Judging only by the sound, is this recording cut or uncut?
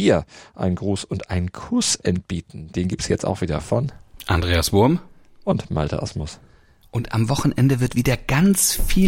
uncut